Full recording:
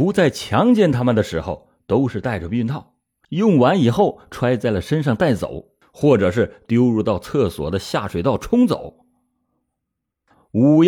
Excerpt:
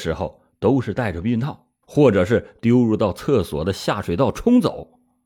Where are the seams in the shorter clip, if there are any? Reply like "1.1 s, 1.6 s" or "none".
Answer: 1.8 s